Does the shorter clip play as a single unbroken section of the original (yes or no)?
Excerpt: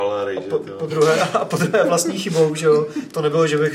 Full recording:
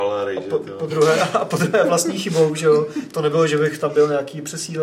yes